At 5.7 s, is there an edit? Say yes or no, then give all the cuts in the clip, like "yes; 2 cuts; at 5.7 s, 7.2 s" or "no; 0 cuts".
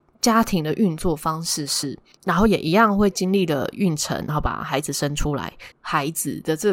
yes; 2 cuts; at 2.2 s, 5.7 s